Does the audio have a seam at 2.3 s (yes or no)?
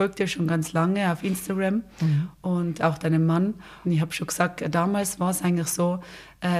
no